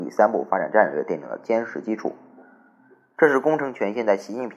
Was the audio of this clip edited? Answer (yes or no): no